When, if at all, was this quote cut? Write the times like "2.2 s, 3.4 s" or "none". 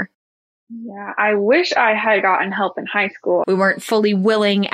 3.4 s